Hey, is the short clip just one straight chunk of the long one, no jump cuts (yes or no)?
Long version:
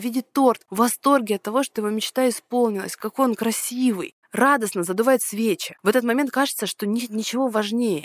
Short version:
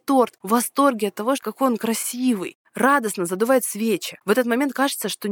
no